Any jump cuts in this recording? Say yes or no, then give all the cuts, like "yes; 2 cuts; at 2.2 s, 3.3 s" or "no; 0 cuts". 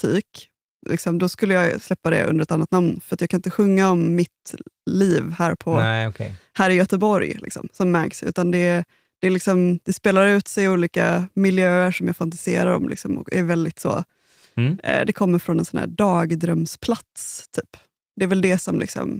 no; 0 cuts